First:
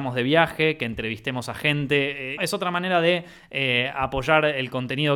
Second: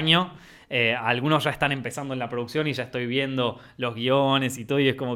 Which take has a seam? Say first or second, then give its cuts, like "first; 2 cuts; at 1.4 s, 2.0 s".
first; 1 cut; at 2.4 s